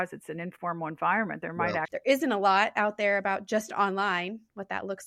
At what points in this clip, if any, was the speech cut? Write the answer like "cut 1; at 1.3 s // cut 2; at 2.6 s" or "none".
cut 1; at 1.8 s